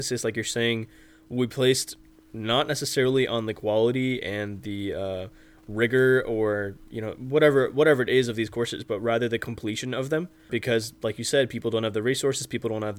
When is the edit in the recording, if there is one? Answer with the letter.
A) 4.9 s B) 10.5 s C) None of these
B